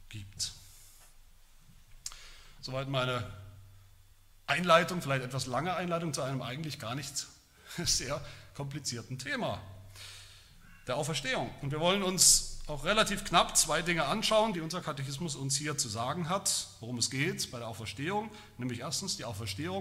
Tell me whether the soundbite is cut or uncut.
cut